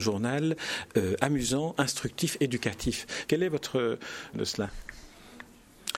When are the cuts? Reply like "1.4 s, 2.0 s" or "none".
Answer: 3.2 s, 4.3 s

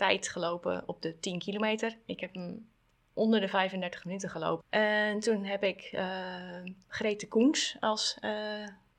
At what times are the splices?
4.6 s

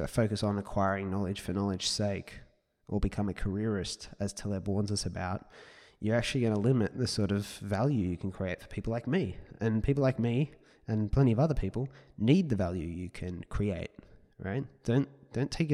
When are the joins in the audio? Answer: none

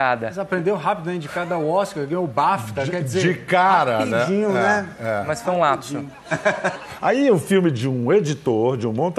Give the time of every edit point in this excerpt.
none

